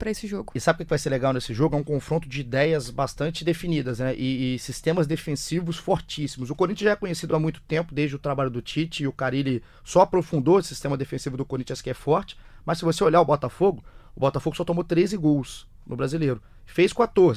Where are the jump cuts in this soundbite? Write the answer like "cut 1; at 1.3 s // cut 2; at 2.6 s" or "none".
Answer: none